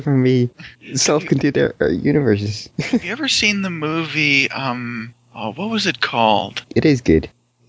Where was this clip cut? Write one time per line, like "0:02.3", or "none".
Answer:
0:06.7